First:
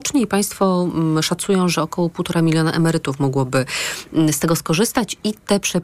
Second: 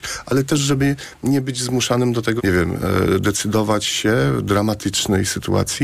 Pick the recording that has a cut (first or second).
second